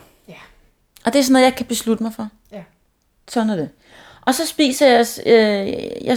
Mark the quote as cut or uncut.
uncut